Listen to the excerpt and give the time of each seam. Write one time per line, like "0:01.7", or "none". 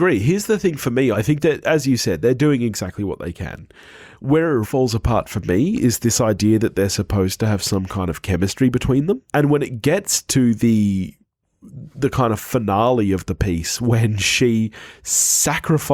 0:01.1
0:04.6
0:09.3